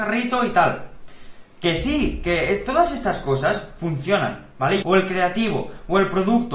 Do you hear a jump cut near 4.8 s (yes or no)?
yes